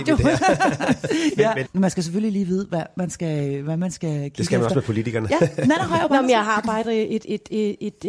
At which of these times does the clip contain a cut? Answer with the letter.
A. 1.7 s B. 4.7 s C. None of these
A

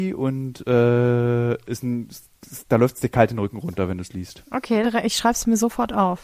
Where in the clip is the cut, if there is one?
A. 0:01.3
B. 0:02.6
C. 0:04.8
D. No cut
C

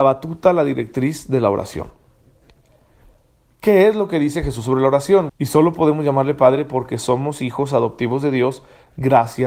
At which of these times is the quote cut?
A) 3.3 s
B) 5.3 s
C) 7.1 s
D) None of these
B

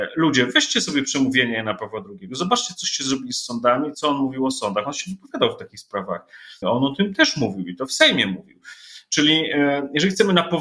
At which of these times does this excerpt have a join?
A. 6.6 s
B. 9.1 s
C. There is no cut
A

